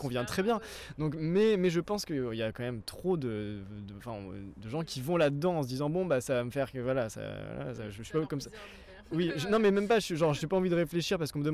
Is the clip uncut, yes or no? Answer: yes